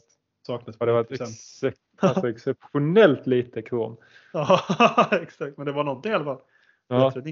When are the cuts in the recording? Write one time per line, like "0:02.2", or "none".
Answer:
none